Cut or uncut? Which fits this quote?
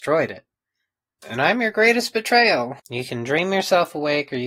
cut